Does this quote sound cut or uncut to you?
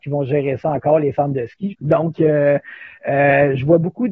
cut